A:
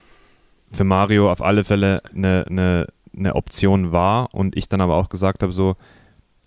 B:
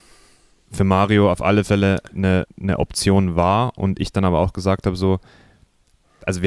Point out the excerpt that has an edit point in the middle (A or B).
B